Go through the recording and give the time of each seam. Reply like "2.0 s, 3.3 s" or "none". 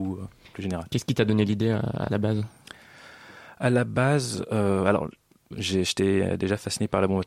none